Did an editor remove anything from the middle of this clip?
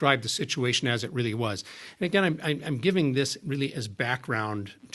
no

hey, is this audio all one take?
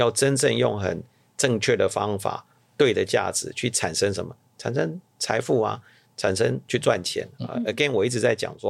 yes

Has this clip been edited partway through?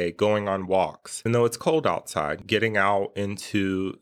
yes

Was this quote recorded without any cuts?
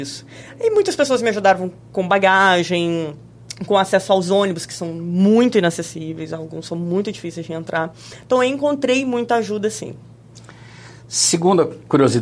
yes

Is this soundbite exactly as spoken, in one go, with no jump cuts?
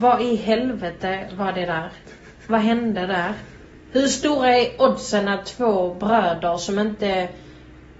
yes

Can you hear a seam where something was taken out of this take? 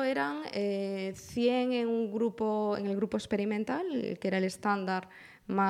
no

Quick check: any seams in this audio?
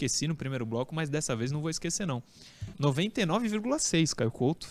yes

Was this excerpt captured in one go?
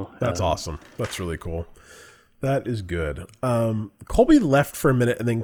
yes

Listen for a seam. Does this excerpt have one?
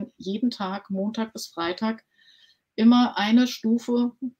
no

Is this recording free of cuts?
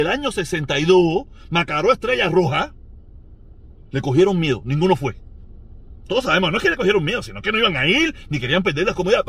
yes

